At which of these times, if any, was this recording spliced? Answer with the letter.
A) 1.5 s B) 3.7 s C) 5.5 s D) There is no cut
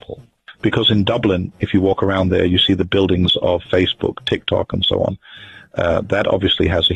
B